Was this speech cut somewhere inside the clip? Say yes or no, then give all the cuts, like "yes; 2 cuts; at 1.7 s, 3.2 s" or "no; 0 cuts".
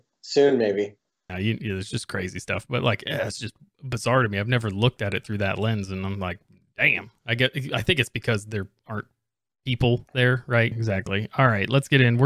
yes; 2 cuts; at 1.3 s, 10.7 s